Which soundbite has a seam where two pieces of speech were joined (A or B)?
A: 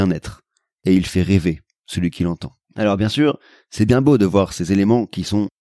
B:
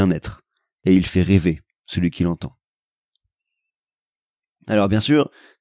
A